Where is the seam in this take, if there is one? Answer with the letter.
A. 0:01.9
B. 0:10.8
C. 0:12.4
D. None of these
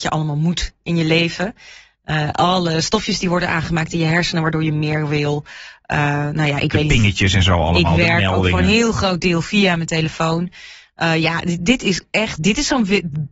C